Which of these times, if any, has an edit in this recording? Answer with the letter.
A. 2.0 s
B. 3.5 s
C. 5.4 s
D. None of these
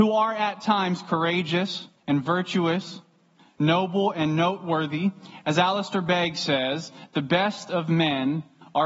A